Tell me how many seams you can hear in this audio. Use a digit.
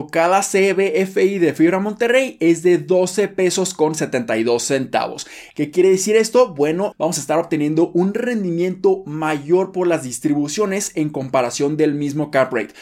2